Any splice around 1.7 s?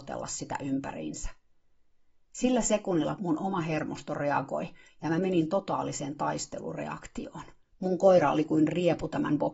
no; 2 cuts; at 3.2 s, 7.7 s

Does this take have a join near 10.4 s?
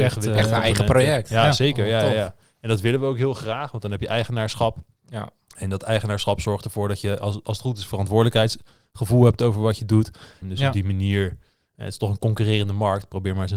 yes; 1 cut; at 10.4 s

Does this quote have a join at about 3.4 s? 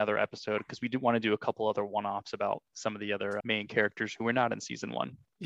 yes; 1 cut; at 3.4 s

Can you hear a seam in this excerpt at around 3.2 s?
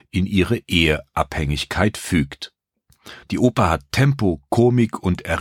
yes; 1 cut; at 3.2 s

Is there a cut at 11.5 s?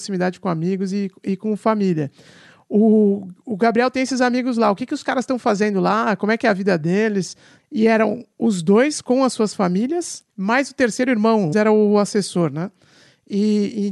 yes; 3 cuts; at 7.6 s, 10.3 s, 11.5 s

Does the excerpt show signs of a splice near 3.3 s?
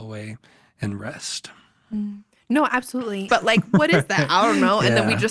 yes; 1 cut; at 3.3 s

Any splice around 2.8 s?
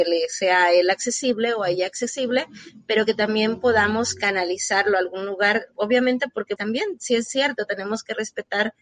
no; 1 cut; at 6.6 s

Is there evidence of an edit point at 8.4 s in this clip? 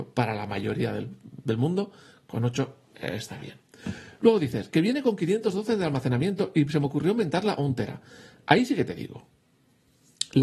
no; 0 cuts

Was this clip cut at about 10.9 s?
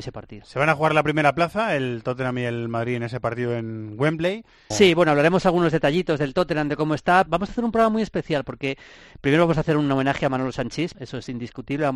yes; 3 cuts; at 4.7 s, 7.3 s, 10.9 s

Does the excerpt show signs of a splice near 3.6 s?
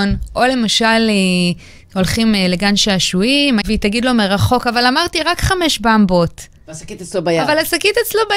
yes; 1 cut; at 3.6 s

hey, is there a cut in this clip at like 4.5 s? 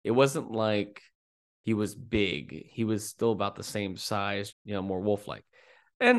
yes; 1 cut; at 4.5 s

